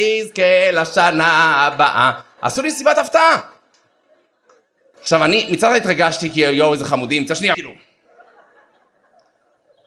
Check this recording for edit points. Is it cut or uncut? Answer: cut